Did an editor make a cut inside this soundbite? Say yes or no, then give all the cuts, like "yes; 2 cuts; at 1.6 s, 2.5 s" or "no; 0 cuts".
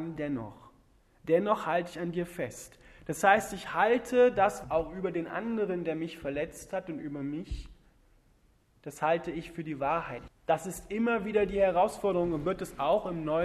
yes; 2 cuts; at 4.6 s, 10.3 s